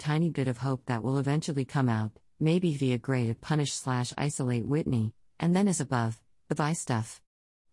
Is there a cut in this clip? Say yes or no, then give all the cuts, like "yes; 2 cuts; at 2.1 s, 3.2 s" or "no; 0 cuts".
no; 0 cuts